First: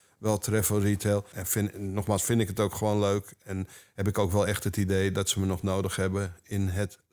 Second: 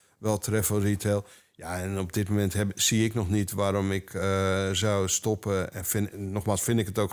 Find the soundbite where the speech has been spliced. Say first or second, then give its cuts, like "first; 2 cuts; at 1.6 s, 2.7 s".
first; 1 cut; at 1.3 s